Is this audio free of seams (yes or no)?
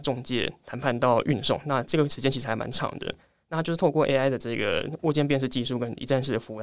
yes